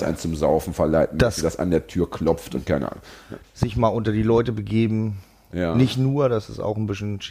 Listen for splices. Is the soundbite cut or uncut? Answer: cut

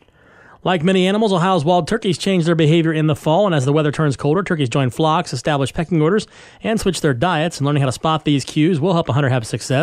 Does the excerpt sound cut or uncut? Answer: uncut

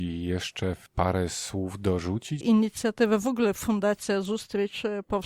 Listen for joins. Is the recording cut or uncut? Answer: cut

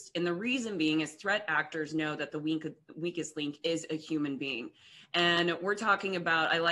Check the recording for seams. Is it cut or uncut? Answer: uncut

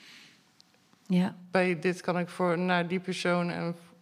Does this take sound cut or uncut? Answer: uncut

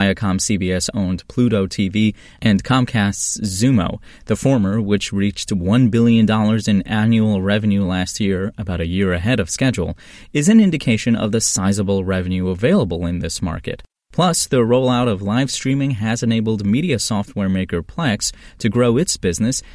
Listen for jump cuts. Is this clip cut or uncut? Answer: uncut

